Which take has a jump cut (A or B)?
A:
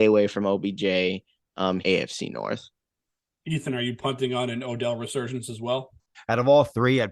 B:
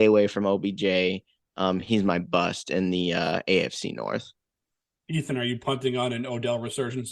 A